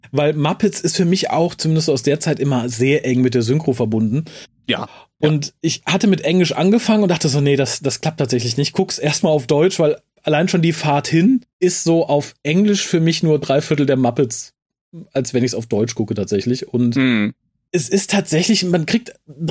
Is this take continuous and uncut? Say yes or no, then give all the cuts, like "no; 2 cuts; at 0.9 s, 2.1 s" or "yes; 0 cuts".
yes; 0 cuts